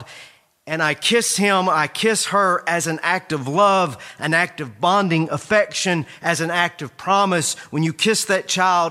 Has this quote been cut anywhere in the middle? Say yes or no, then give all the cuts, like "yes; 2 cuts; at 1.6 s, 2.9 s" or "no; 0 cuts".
no; 0 cuts